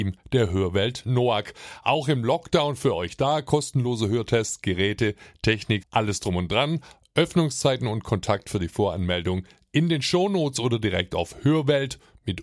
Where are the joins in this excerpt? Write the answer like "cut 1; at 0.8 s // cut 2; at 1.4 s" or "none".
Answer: cut 1; at 5.8 s